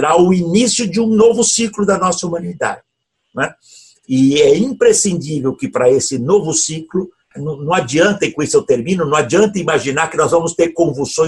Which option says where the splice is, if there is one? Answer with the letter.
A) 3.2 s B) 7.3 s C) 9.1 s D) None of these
B